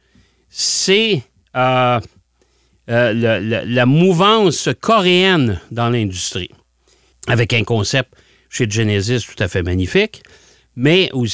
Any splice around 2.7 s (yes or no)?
no